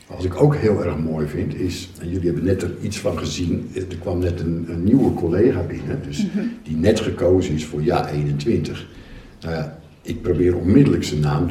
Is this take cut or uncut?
cut